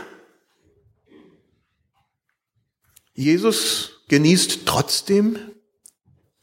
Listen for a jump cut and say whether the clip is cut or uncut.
uncut